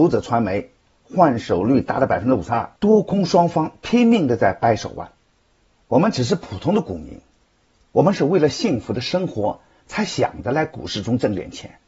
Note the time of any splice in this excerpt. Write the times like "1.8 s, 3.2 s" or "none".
2.8 s

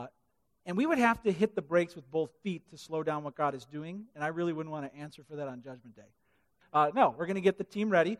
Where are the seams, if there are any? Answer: 6.6 s

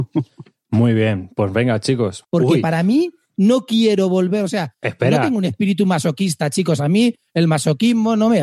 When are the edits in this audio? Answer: 2.2 s

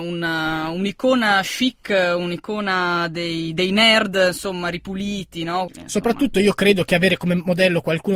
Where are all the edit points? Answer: 5.7 s

